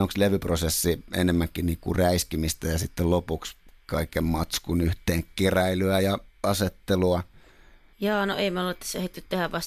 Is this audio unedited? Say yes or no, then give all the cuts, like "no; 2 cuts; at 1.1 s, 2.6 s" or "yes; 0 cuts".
yes; 0 cuts